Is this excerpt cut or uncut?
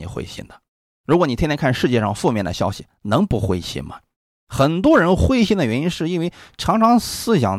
cut